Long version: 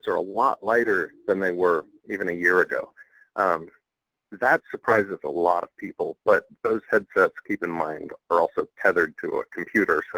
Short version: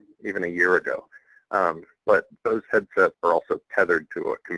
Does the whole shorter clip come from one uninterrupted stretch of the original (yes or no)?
no